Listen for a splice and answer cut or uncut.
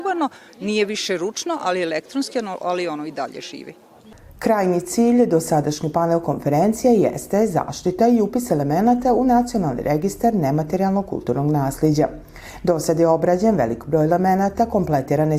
uncut